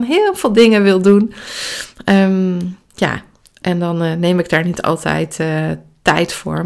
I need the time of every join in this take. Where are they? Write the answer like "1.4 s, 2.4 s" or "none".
none